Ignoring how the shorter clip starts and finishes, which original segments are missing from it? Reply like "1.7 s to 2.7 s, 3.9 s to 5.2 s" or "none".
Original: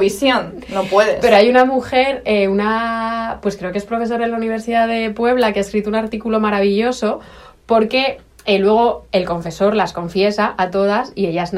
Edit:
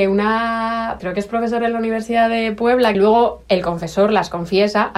3.4 s to 3.6 s, 5.5 s to 8.6 s